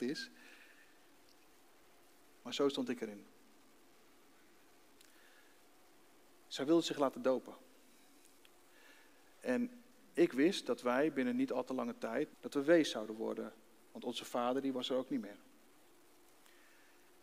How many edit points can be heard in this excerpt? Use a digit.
1